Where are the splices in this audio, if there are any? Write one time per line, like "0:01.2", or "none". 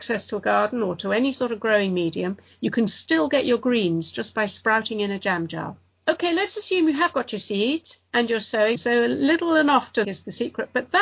0:08.8
0:10.0